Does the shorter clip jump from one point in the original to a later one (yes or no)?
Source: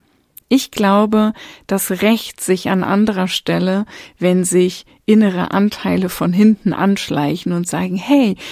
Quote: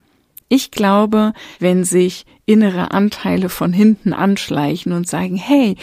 yes